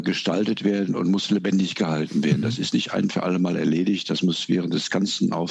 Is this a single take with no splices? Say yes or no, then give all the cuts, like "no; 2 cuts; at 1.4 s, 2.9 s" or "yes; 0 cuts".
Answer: yes; 0 cuts